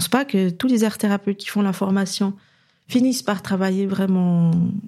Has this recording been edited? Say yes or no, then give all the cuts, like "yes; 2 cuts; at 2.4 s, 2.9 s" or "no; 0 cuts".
no; 0 cuts